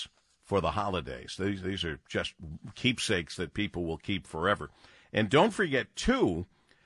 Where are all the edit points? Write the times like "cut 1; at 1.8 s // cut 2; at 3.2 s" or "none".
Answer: none